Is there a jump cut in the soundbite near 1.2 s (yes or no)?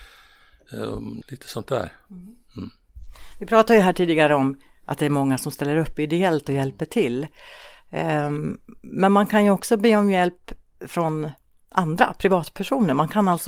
yes